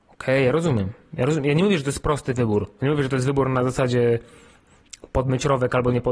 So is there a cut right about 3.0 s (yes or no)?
no